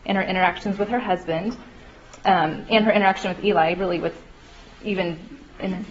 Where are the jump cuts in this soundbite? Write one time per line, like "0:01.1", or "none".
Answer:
none